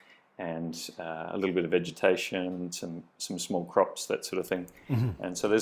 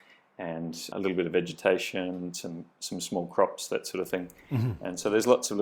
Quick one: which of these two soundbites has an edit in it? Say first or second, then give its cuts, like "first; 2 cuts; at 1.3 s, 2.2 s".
second; 1 cut; at 0.9 s